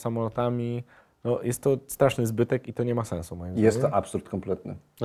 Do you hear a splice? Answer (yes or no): no